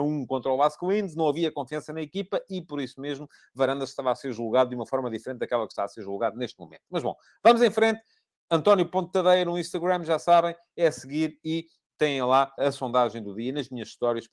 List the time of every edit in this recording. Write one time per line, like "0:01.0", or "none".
0:12.6